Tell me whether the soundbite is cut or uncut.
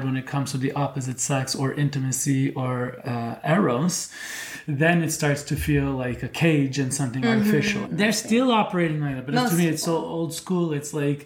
cut